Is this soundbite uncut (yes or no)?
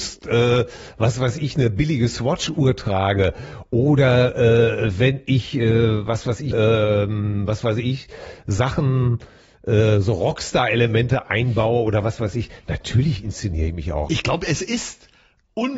no